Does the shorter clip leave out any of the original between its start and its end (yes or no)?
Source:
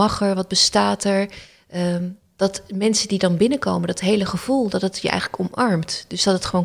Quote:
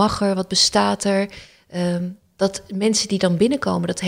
no